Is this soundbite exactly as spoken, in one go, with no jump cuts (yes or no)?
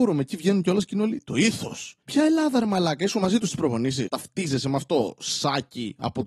no